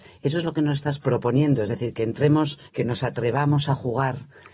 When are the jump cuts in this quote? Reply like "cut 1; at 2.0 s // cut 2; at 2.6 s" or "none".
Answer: cut 1; at 2.7 s